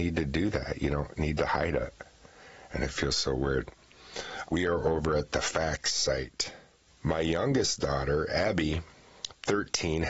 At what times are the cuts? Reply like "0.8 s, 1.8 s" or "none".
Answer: 4.5 s, 6.8 s